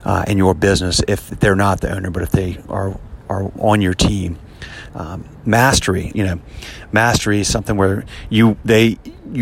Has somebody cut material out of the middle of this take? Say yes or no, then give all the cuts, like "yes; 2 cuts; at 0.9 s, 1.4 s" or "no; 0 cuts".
yes; 2 cuts; at 4.9 s, 6.1 s